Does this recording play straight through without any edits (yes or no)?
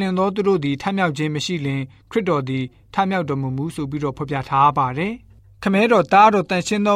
yes